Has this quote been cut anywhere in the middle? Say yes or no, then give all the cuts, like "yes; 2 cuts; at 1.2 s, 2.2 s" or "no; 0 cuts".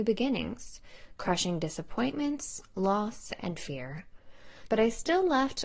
yes; 2 cuts; at 3.4 s, 4.7 s